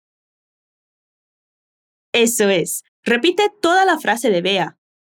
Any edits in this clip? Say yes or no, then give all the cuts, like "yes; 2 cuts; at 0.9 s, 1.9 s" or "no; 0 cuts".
yes; 1 cut; at 2.9 s